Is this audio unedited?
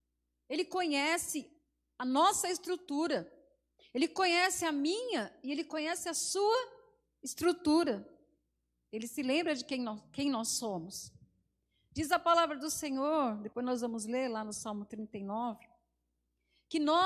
yes; 0 cuts

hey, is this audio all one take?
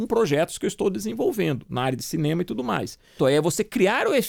no; 1 cut; at 3.2 s

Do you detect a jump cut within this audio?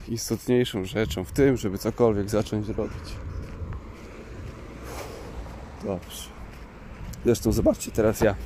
no; 0 cuts

